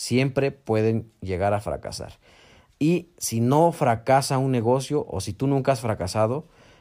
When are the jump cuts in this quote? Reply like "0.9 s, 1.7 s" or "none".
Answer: none